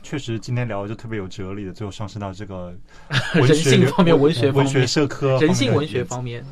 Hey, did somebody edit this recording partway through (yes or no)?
no